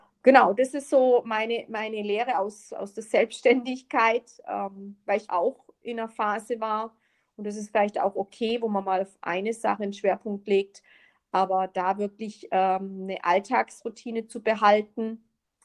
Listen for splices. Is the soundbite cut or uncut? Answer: cut